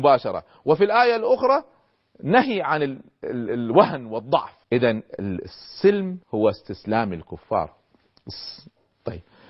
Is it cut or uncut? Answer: cut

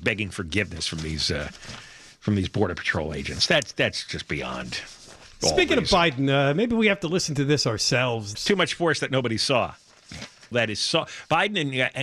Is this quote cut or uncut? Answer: cut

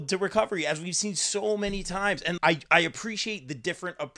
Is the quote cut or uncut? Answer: cut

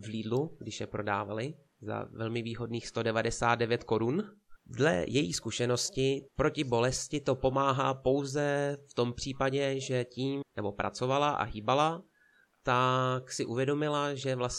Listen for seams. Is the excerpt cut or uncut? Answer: cut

